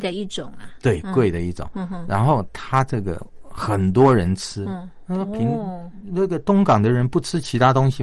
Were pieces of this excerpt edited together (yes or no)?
no